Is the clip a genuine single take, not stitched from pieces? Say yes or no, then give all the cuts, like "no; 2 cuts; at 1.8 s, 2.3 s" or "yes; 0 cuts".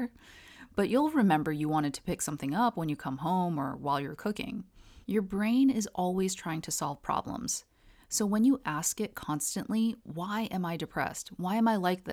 no; 1 cut; at 5.0 s